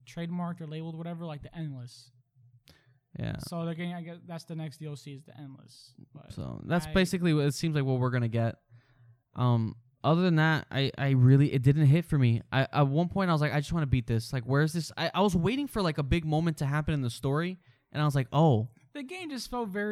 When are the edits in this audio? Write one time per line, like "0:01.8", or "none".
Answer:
none